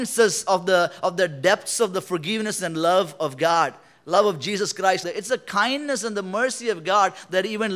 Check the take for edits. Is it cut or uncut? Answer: cut